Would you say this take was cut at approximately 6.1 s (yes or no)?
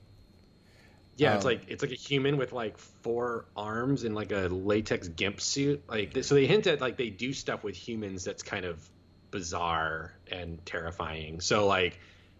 yes